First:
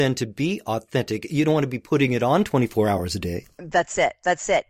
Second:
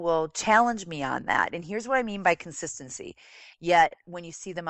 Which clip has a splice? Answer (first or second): second